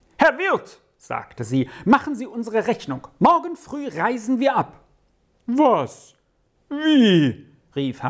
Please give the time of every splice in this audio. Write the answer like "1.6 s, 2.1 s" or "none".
none

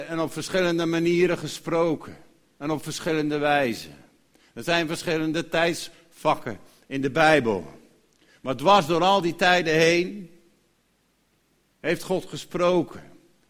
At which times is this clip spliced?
none

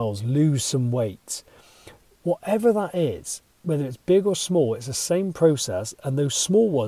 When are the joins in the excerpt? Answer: 2.2 s

